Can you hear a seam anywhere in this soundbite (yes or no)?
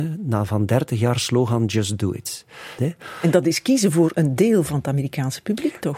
yes